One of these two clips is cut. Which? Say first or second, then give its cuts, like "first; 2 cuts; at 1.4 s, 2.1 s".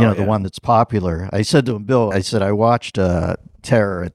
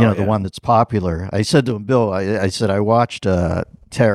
first; 1 cut; at 2.1 s